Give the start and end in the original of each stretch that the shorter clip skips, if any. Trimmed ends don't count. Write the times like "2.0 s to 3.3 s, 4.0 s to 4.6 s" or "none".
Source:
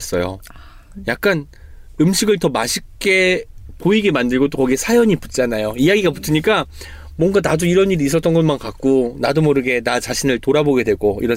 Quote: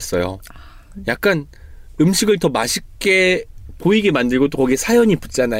none